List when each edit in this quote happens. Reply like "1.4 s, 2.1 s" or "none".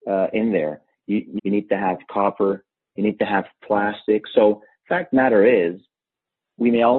1.4 s